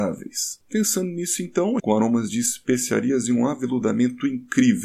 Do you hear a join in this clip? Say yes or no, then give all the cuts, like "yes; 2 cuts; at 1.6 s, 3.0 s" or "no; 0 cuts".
yes; 1 cut; at 1.8 s